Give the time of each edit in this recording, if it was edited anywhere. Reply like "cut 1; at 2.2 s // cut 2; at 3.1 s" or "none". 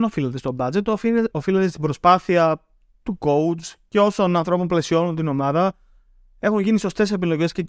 cut 1; at 1.3 s